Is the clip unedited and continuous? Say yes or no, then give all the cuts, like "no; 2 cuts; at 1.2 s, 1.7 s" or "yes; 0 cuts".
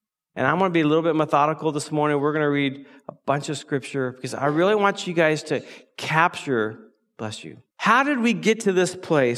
no; 1 cut; at 7.7 s